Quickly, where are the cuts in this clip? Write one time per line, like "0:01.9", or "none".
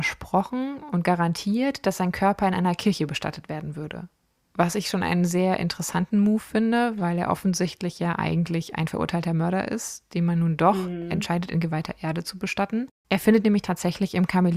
none